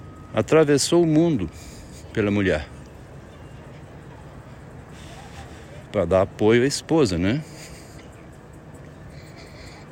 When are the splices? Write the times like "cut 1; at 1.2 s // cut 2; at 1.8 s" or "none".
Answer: none